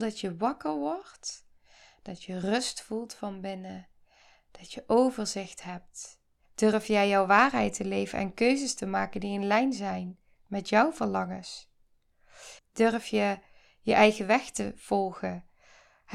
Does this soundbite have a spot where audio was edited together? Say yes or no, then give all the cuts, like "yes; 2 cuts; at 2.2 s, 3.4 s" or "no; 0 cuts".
yes; 2 cuts; at 6.5 s, 12.6 s